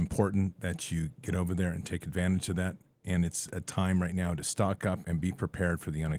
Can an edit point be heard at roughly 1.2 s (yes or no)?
no